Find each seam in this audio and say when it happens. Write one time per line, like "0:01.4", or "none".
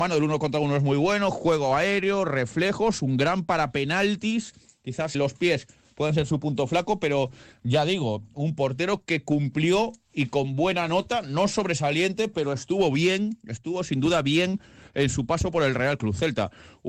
0:05.1

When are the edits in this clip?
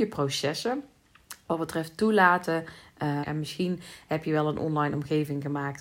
0:03.2

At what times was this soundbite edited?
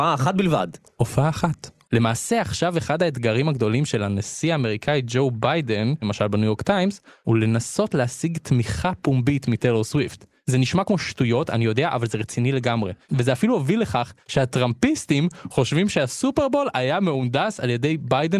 0:01.8
0:06.0

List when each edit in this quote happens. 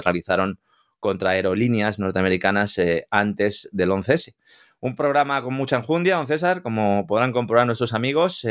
none

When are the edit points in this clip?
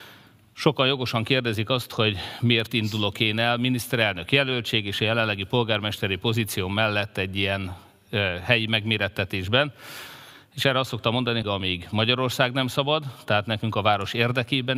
0:11.4

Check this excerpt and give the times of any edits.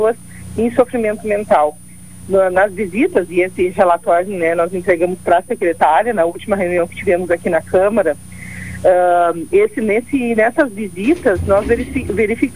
none

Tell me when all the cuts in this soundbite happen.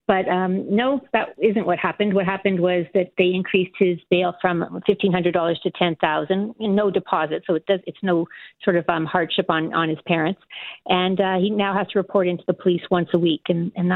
none

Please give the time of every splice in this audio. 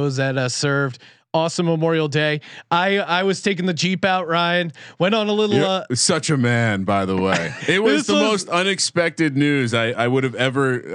0:07.6

